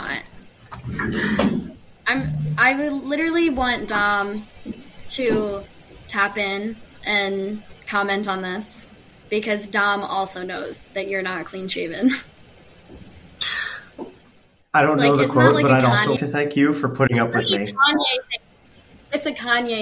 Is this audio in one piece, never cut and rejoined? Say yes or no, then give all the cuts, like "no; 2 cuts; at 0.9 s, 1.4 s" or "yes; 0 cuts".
no; 2 cuts; at 14.6 s, 16.2 s